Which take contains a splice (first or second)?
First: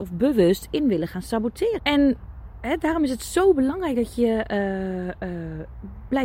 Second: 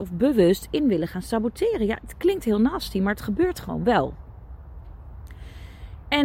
first